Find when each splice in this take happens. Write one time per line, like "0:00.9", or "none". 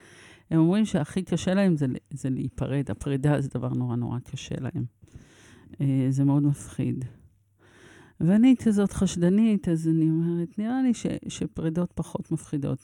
none